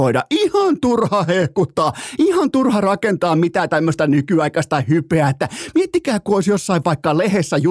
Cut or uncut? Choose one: uncut